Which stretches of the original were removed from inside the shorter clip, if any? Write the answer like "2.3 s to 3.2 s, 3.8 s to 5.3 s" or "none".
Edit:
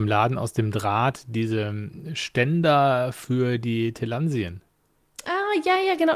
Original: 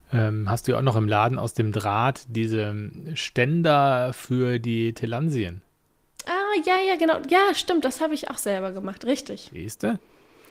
none